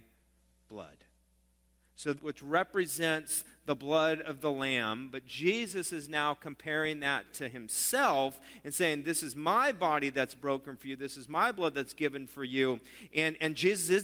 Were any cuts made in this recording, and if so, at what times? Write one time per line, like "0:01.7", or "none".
0:02.2